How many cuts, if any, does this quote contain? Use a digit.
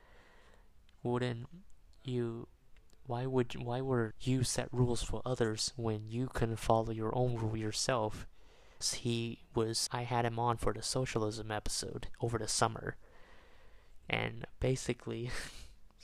3